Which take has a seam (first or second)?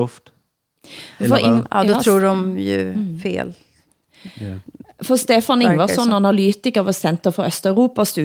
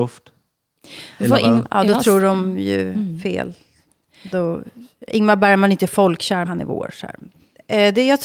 second